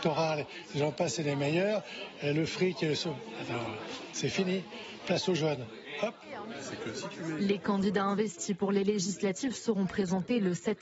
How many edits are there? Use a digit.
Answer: 0